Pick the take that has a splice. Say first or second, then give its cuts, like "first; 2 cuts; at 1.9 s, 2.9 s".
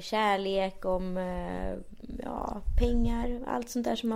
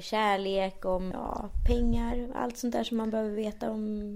second; 1 cut; at 1.1 s